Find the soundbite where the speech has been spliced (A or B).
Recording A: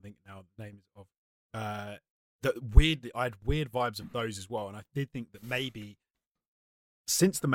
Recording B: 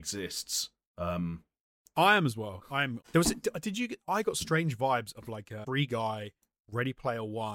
B